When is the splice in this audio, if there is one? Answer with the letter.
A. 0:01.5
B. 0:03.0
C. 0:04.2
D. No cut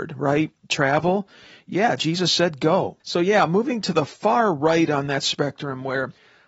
B